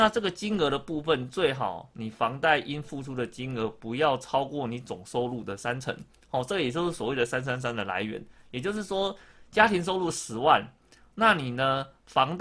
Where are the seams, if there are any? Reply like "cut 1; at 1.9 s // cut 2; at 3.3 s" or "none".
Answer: none